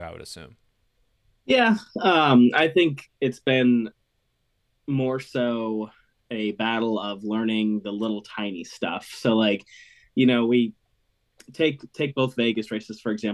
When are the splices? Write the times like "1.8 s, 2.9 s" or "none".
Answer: none